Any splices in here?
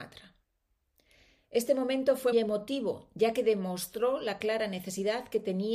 yes; 1 cut; at 2.3 s

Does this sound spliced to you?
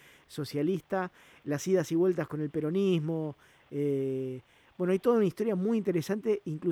no; 0 cuts

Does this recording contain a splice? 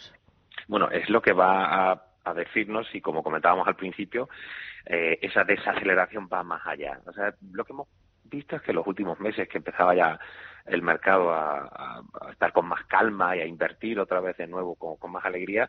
no; 0 cuts

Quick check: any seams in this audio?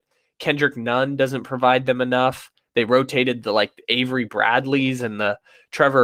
no; 0 cuts

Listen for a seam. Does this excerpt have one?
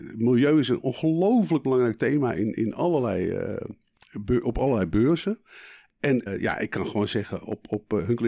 yes; 1 cut; at 6.3 s

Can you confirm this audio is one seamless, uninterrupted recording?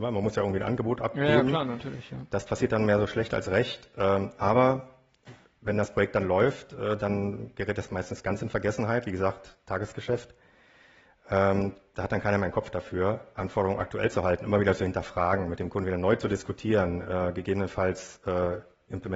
yes; 0 cuts

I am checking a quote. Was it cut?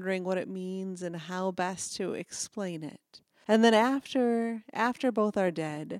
yes; 1 cut; at 3.4 s

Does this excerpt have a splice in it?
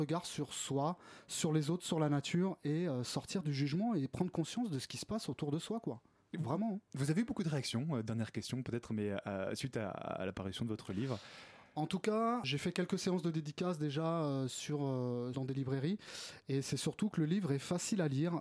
yes; 2 cuts; at 12.4 s, 15.3 s

